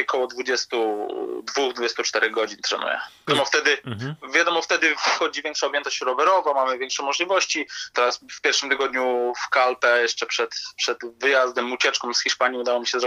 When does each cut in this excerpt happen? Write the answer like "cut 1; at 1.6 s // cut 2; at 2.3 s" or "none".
cut 1; at 3.3 s // cut 2; at 7.9 s